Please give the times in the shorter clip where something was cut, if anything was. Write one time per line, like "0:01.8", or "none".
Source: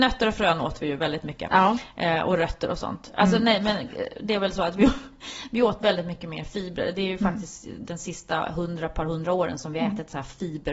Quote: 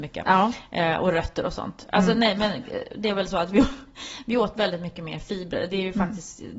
none